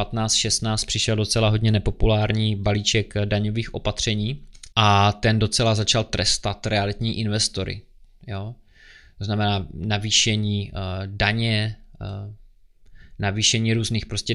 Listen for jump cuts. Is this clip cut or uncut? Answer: cut